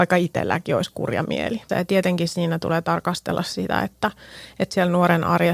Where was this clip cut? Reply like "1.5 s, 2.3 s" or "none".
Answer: 1.7 s